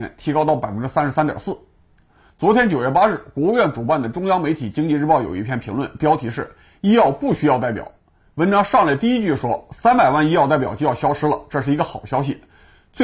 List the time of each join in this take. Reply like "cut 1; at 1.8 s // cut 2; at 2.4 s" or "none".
cut 1; at 2.3 s